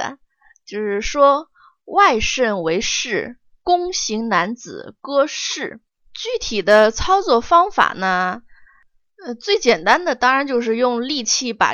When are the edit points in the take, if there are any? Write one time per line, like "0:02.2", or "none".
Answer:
0:06.0